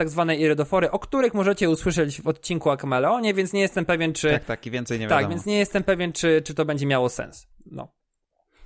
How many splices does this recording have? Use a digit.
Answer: 0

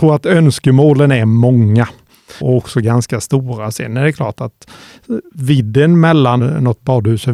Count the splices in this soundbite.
2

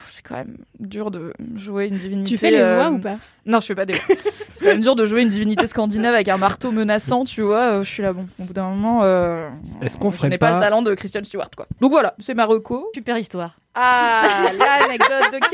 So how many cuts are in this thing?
2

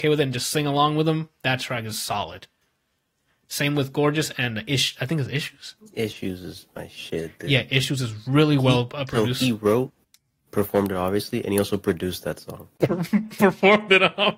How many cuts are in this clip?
0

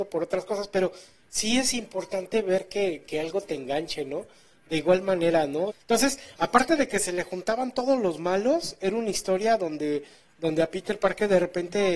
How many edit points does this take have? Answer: 1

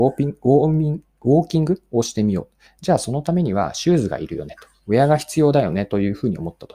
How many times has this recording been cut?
0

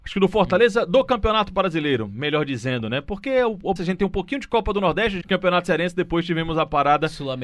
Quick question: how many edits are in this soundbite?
2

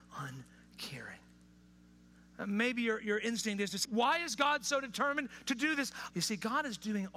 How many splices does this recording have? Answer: 2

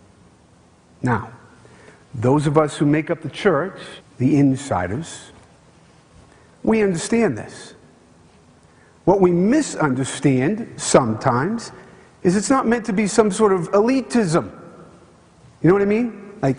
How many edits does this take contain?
1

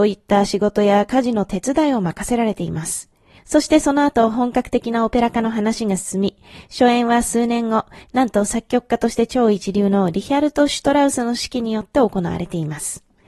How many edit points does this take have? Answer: 2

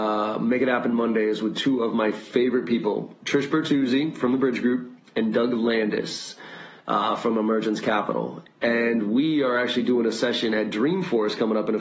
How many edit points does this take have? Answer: 0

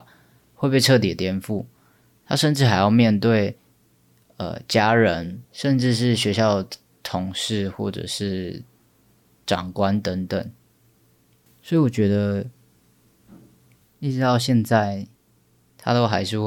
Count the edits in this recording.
2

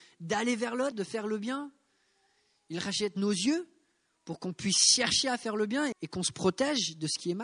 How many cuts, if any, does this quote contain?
2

